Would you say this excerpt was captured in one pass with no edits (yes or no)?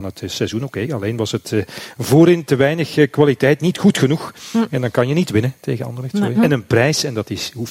no